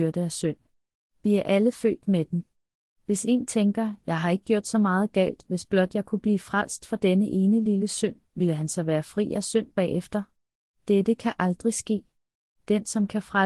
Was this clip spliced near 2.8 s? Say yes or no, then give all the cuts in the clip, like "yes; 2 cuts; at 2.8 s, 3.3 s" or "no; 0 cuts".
no; 0 cuts